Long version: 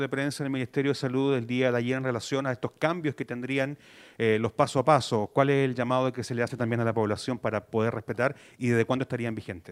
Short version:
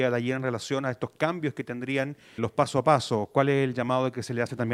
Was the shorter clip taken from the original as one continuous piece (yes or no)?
no